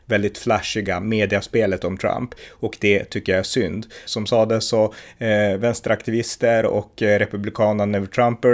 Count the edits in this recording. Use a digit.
1